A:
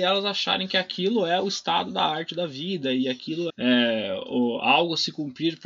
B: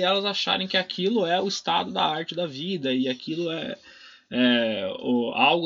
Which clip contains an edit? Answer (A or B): A